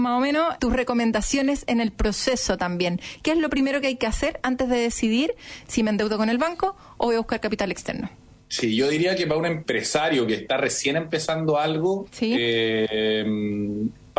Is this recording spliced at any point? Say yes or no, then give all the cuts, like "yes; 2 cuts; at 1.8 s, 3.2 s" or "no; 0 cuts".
no; 0 cuts